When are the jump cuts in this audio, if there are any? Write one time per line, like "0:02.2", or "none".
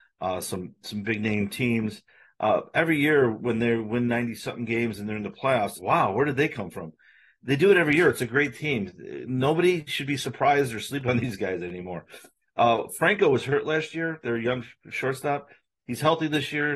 0:05.8